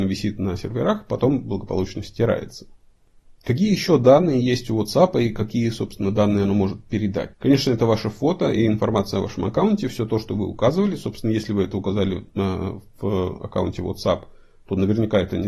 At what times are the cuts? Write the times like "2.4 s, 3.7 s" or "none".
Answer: 7.3 s